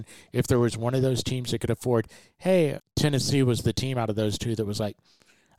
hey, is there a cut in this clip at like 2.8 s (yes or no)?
yes